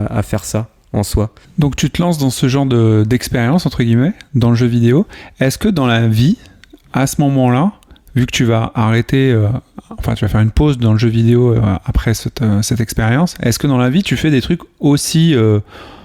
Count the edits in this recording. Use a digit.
1